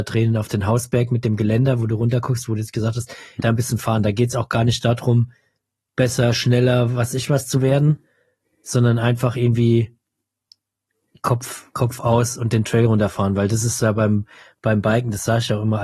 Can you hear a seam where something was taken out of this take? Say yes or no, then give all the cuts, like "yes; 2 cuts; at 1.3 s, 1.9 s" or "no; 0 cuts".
yes; 1 cut; at 3.4 s